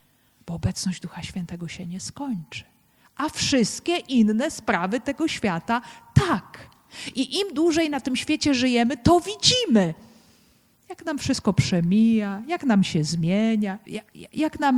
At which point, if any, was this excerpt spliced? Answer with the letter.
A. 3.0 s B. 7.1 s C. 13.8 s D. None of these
C